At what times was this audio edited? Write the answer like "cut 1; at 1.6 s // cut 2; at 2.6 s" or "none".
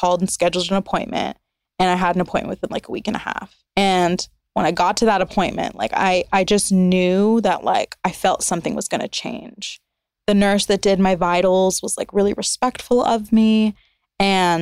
cut 1; at 3.7 s